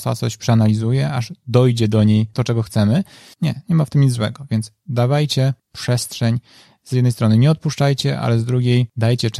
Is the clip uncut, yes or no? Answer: no